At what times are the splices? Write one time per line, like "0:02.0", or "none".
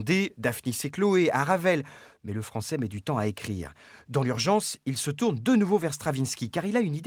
none